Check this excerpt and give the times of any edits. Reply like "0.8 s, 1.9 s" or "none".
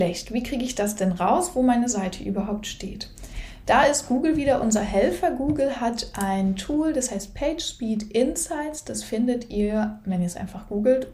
none